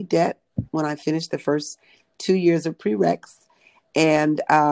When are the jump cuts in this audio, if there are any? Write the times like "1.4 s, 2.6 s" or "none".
none